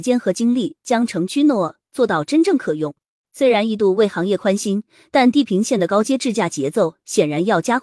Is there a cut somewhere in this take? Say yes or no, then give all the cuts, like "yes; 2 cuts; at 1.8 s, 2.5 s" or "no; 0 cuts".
no; 0 cuts